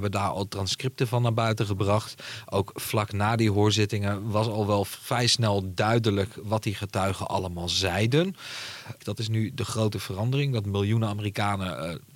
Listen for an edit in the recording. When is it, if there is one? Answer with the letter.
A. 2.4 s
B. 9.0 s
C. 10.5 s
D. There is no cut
B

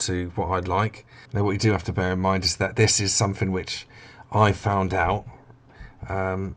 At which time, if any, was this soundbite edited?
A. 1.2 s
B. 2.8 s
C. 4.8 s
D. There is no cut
A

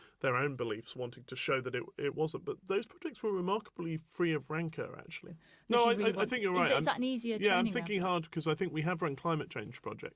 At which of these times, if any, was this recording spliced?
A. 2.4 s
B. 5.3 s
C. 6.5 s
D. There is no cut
B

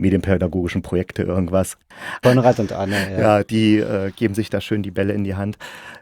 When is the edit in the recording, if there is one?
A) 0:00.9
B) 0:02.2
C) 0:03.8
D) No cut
B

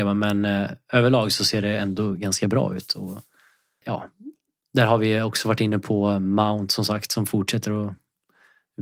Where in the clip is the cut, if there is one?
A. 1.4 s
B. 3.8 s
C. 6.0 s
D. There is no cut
B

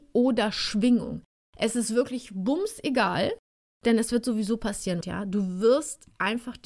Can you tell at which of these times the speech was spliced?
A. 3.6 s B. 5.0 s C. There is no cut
B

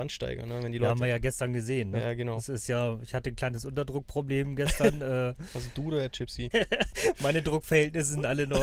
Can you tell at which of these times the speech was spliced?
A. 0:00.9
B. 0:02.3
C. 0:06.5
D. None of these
C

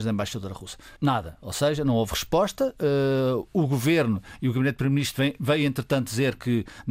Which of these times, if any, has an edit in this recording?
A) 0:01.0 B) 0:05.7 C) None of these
A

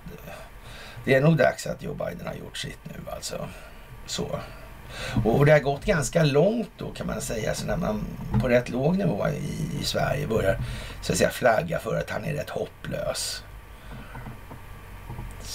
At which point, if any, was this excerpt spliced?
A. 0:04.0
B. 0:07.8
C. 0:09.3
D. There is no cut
B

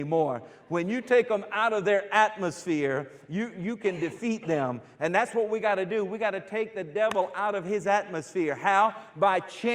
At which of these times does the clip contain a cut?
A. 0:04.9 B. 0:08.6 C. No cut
C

